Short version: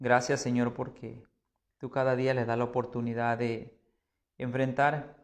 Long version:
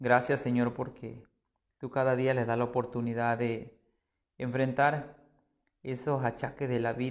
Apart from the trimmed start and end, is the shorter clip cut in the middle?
no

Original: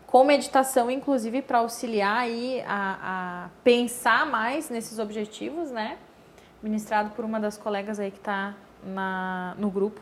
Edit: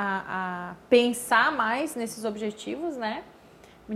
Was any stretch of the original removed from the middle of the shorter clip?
no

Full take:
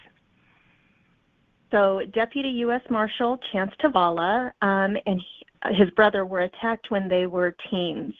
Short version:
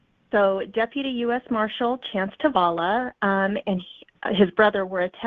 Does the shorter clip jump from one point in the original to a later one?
no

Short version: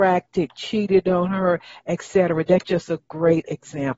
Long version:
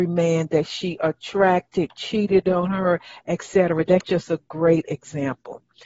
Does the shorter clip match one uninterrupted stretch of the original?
yes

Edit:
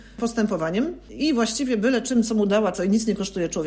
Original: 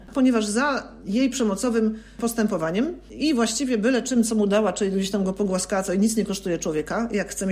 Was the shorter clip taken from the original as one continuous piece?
no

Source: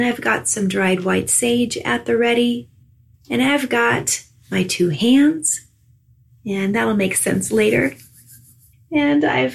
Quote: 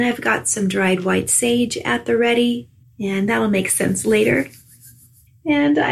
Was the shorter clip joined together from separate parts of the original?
yes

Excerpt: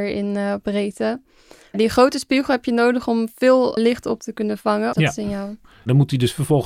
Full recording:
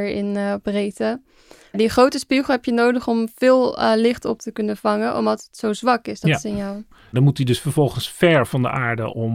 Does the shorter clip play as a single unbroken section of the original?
no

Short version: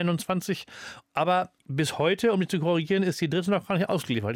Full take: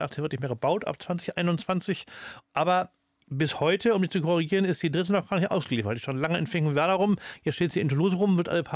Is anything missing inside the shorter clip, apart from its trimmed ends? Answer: yes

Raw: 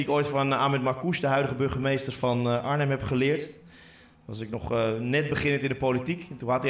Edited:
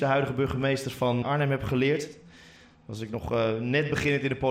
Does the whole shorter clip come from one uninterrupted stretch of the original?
no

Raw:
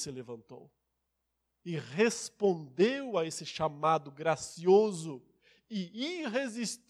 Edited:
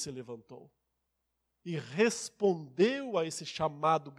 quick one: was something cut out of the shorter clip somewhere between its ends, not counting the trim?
no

